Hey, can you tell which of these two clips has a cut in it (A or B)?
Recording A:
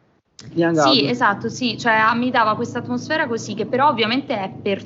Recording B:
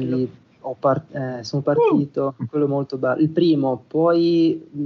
A